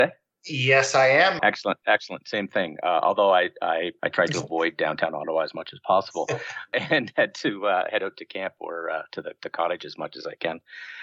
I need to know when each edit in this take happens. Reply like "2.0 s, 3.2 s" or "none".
1.4 s, 4.0 s